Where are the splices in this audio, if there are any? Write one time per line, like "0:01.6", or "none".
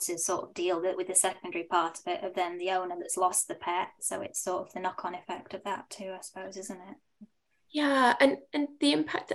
none